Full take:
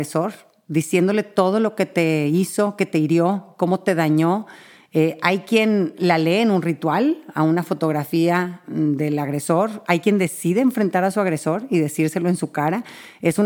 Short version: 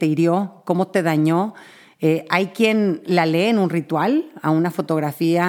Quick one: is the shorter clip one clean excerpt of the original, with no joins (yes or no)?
yes